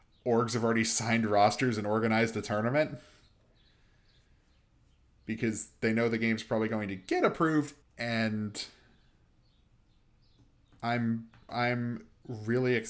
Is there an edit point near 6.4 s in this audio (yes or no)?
no